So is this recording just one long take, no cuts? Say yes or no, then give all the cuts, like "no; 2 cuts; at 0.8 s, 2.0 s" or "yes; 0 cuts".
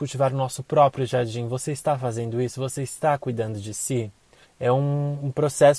no; 1 cut; at 4.4 s